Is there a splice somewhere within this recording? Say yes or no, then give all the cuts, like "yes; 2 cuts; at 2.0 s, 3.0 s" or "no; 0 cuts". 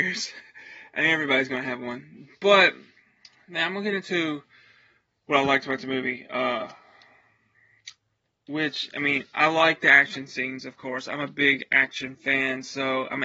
no; 0 cuts